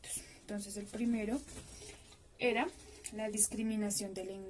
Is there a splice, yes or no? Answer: no